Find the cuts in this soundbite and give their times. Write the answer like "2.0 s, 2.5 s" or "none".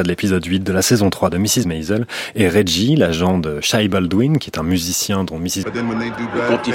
1.6 s, 5.6 s